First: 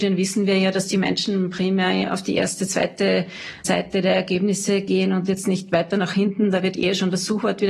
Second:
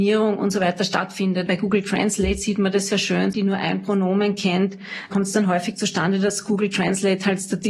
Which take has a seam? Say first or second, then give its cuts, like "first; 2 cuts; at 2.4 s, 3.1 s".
second; 2 cuts; at 1.5 s, 3.3 s